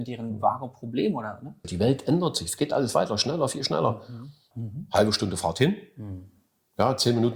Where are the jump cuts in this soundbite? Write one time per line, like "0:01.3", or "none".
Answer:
0:01.6
0:04.5